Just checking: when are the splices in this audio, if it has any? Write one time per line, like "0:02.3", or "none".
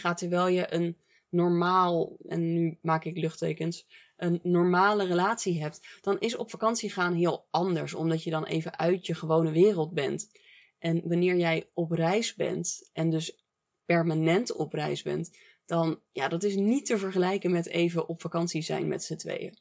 none